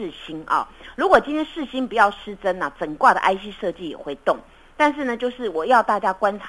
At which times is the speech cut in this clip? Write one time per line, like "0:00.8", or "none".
none